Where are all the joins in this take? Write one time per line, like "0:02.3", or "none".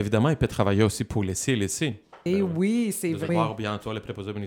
0:02.3
0:03.3